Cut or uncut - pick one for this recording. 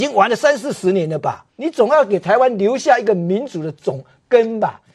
cut